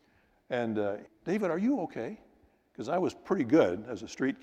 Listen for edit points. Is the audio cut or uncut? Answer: cut